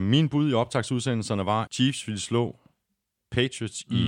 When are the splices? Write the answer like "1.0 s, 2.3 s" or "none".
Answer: 1.7 s